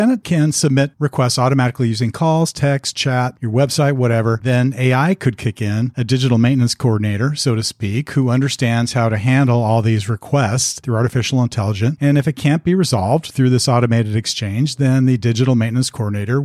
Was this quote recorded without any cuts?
no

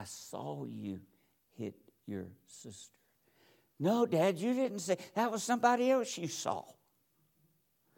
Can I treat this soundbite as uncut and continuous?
yes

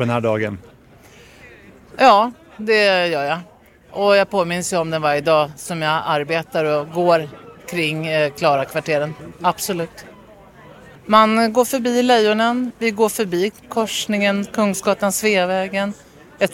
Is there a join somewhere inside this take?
yes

